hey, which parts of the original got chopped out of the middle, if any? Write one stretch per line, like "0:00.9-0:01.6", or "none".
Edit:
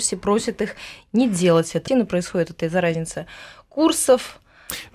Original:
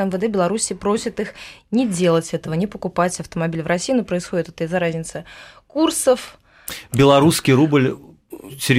0:02.5-0:03.9